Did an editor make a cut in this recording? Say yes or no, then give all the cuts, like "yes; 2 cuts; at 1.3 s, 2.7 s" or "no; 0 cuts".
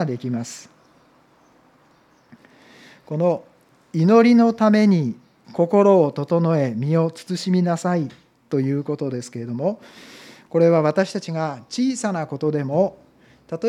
no; 0 cuts